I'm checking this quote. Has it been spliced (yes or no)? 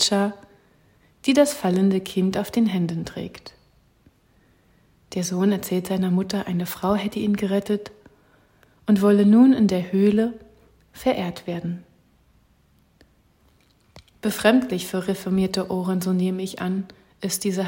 no